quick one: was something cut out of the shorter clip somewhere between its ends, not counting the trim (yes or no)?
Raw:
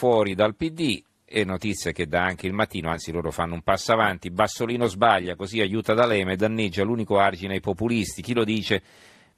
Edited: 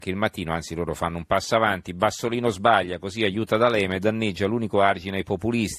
no